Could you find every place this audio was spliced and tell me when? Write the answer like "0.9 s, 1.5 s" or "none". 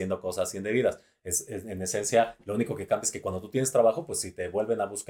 none